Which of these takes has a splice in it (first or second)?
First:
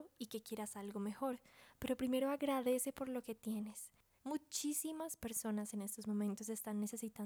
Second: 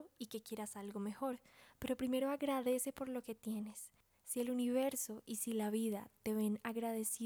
first